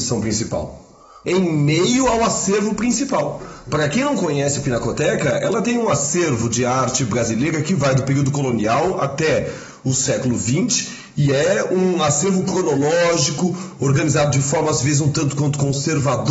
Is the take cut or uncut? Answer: cut